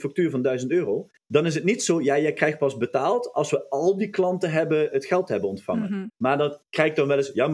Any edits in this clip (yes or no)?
yes